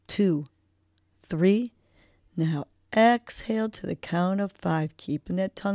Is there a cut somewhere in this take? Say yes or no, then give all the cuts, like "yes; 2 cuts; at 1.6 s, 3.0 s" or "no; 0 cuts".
no; 0 cuts